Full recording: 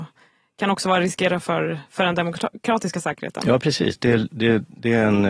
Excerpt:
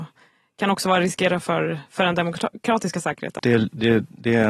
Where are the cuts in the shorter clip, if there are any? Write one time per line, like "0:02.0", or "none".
0:03.4